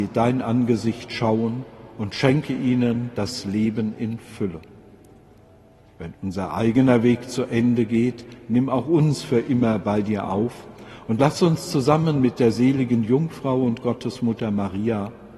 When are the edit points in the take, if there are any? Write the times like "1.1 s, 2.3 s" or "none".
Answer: none